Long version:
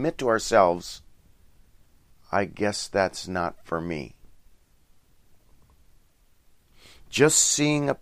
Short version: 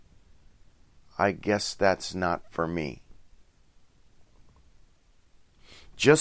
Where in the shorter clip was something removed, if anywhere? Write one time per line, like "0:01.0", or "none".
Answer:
none